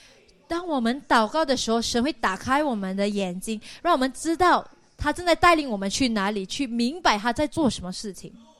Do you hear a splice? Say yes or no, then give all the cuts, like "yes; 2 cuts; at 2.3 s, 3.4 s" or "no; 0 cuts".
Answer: no; 0 cuts